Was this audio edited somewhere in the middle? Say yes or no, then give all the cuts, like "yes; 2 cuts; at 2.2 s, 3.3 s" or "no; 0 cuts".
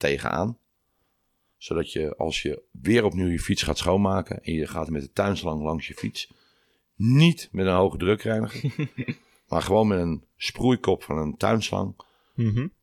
yes; 1 cut; at 4.9 s